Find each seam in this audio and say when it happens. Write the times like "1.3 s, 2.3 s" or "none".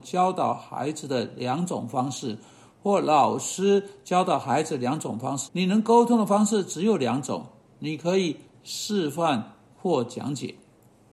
5.5 s